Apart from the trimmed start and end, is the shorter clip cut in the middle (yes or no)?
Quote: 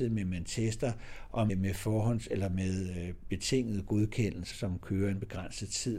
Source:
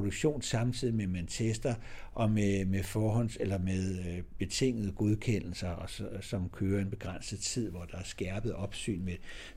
yes